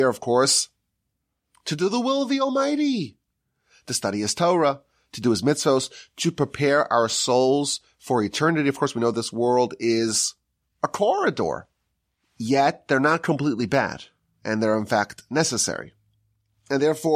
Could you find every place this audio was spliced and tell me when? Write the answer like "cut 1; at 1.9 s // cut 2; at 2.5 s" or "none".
cut 1; at 12.2 s